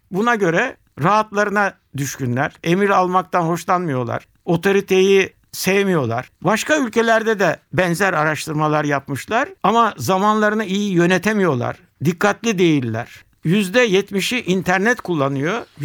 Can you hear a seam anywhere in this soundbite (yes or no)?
yes